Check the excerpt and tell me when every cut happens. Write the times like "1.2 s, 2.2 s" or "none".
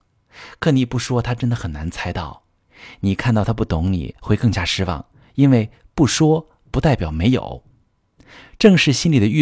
none